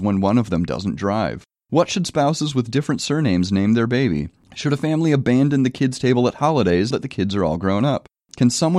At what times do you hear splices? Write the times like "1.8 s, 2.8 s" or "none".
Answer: 6.9 s